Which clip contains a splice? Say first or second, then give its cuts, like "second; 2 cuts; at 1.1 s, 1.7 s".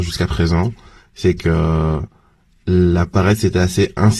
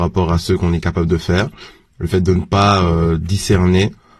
second; 1 cut; at 1.9 s